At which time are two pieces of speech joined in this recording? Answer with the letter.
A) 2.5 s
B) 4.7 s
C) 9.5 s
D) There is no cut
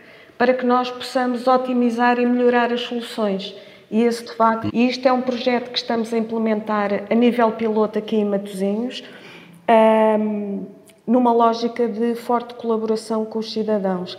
B